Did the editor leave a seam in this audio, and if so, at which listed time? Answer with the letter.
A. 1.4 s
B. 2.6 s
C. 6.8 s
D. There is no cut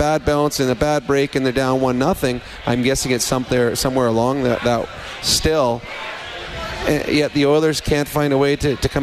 B